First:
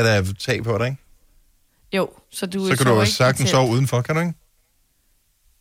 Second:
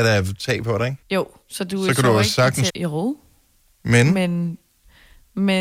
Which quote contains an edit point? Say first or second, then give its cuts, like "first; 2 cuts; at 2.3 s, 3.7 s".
second; 2 cuts; at 1.0 s, 2.7 s